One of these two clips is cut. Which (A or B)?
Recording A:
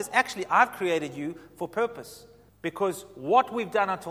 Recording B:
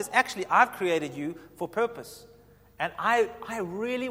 A